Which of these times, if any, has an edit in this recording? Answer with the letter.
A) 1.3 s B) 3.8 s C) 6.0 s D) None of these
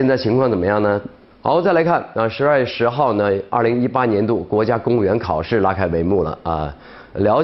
A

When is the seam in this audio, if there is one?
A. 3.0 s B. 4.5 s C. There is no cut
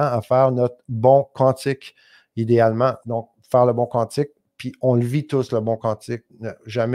A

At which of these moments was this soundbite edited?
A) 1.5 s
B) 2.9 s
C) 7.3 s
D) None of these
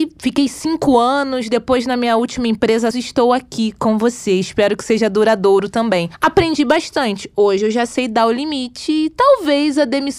B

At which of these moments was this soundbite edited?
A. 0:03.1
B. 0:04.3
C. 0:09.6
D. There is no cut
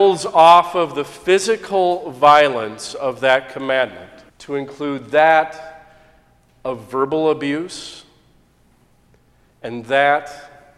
B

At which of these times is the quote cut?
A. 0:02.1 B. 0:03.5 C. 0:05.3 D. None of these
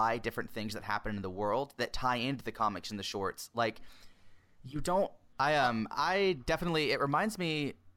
C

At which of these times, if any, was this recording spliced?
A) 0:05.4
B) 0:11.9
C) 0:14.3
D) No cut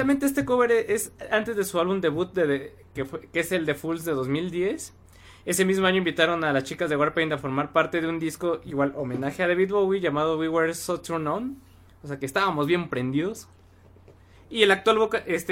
C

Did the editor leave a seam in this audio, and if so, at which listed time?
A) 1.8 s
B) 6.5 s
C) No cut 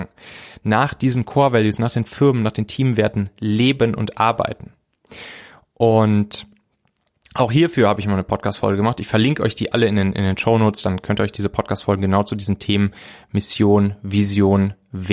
C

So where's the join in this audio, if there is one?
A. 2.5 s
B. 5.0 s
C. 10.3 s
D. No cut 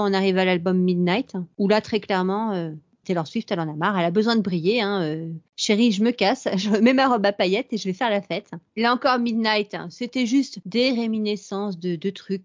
D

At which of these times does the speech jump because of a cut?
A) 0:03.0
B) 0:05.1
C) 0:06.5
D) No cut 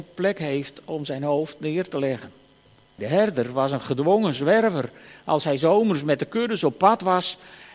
A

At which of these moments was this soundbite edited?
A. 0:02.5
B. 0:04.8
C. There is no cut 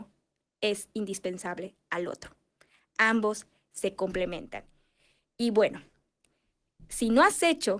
C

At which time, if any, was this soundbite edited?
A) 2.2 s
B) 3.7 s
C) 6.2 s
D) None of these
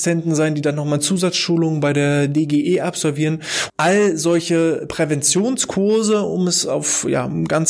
B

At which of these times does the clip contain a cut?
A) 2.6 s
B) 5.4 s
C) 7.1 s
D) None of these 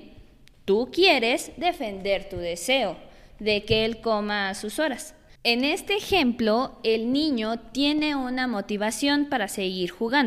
B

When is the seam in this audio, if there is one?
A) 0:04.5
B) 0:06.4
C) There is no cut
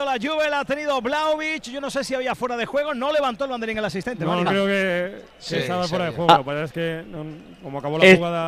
A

